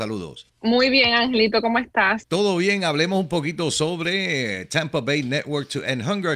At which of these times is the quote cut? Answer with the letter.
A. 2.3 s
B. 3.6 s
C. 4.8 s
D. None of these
D